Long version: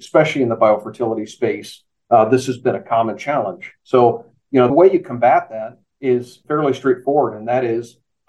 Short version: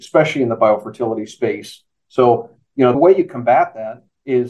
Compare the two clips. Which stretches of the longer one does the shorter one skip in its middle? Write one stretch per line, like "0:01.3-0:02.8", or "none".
0:02.0-0:03.8